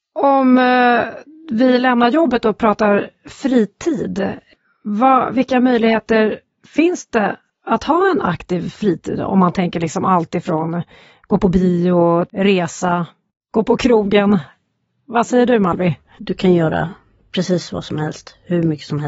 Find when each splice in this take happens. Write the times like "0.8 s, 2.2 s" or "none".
12.3 s, 16.1 s